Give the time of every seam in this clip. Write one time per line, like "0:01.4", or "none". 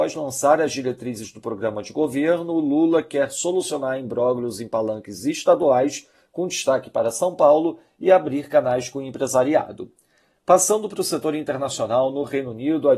none